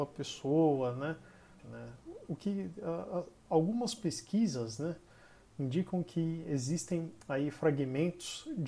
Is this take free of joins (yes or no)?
no